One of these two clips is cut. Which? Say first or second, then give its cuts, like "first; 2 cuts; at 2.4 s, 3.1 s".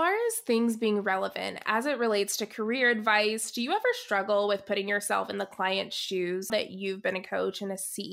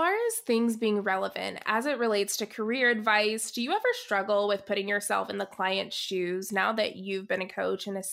first; 1 cut; at 6.5 s